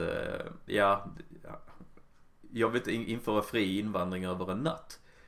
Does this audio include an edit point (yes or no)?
no